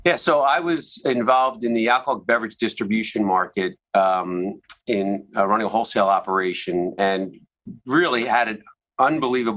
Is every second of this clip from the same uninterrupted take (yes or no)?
yes